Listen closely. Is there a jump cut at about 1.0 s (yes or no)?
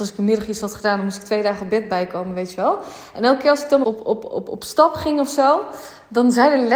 no